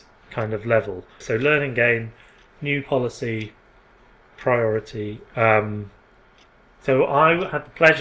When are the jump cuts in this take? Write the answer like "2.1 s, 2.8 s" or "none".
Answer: 1.2 s